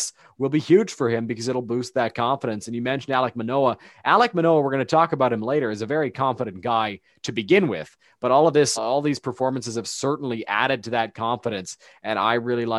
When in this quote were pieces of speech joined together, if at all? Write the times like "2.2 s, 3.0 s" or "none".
8.8 s